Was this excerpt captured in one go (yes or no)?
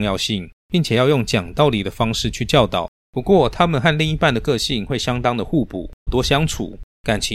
no